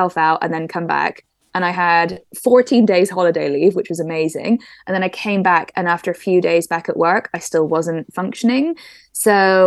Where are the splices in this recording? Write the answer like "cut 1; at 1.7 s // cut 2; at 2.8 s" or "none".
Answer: none